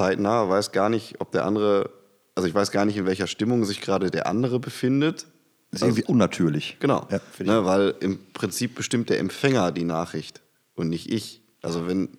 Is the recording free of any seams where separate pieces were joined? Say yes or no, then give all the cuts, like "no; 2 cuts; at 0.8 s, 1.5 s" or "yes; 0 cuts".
no; 1 cut; at 6.1 s